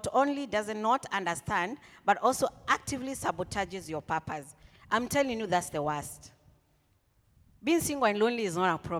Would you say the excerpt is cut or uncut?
uncut